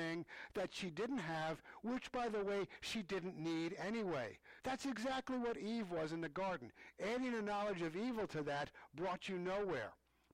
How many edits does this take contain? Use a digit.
2